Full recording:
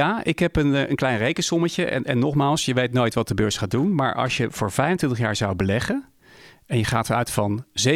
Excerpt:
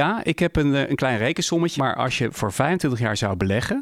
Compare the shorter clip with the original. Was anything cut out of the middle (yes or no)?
yes